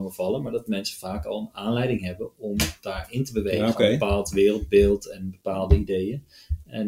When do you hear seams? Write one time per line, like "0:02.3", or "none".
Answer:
none

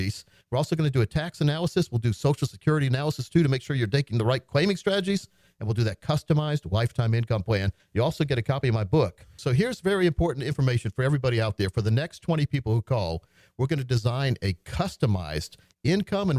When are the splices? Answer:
0:09.4

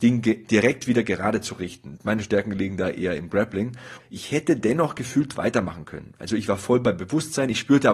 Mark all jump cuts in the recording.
0:02.0
0:04.0

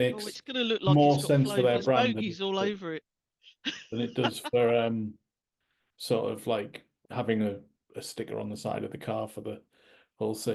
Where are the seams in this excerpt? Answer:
none

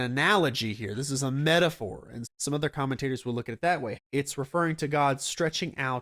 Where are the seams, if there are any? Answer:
0:02.2
0:03.9

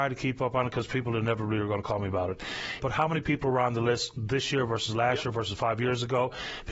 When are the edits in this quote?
0:02.8

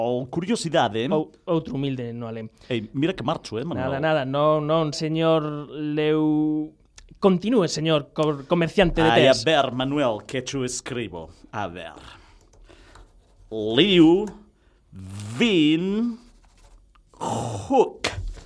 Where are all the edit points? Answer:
0:04.9

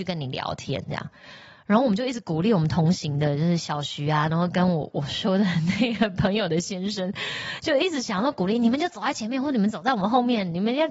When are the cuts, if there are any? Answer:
none

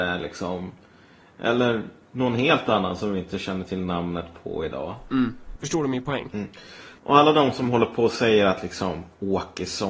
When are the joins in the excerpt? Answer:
0:05.6
0:07.0

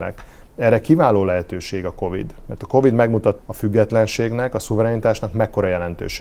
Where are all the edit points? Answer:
0:03.4

